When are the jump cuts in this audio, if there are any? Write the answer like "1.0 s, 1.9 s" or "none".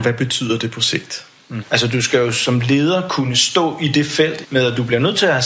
1.6 s, 4.4 s